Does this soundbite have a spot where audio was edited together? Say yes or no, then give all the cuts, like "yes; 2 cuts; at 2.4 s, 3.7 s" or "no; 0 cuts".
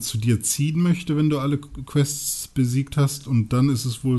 no; 0 cuts